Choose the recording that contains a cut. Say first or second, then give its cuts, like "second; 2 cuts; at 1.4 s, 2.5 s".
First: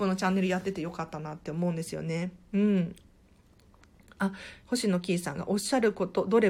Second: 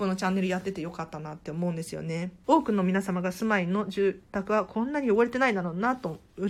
second; 2 cuts; at 2.4 s, 4.2 s